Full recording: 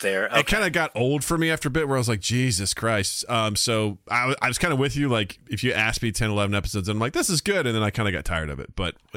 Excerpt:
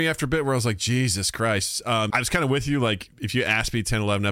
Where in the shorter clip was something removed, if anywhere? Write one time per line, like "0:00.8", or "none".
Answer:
0:02.1